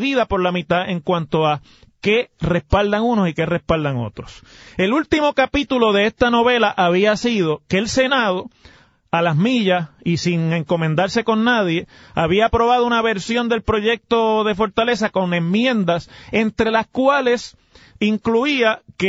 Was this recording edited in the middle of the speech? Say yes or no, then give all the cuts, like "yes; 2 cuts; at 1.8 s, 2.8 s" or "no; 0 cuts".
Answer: no; 0 cuts